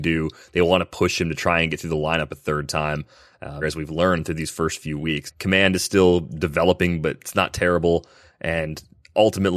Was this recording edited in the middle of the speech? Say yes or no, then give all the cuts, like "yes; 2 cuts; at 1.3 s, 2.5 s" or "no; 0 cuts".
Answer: yes; 3 cuts; at 3.6 s, 5.3 s, 8.3 s